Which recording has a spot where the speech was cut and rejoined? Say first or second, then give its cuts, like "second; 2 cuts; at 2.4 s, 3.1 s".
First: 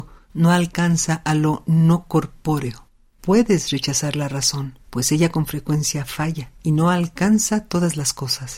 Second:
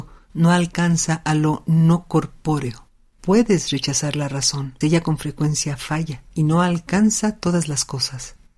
second; 1 cut; at 4.8 s